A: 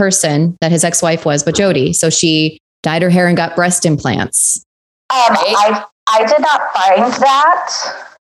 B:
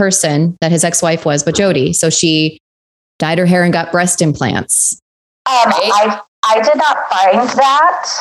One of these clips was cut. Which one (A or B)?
A